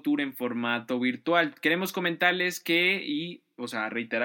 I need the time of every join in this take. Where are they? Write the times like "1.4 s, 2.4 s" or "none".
none